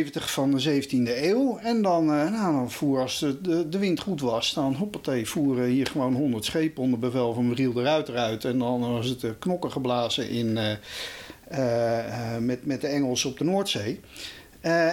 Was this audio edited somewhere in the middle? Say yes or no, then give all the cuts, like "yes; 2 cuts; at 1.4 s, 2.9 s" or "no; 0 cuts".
no; 0 cuts